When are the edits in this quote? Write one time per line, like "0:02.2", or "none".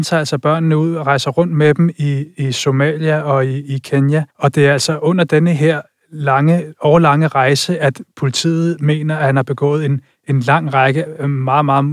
0:04.3